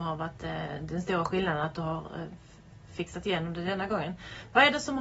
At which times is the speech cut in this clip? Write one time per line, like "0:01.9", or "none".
none

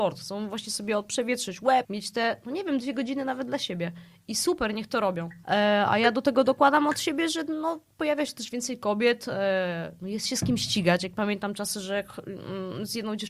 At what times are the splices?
0:01.8
0:05.4

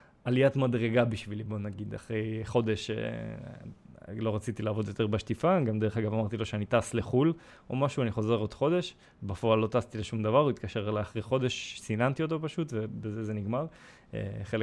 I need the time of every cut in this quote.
none

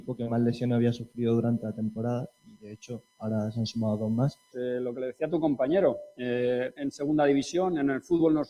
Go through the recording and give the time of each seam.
0:04.5
0:06.8

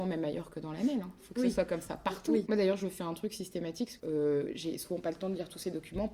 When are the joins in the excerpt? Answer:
0:02.5
0:04.0

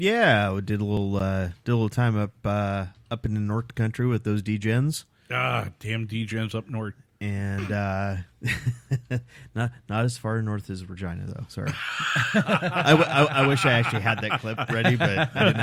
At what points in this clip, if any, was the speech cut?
none

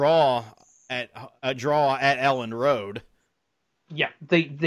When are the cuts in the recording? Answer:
none

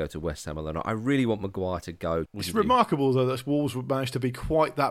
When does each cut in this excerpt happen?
0:02.3

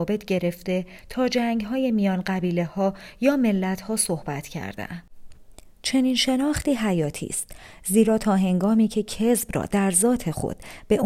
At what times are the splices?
none

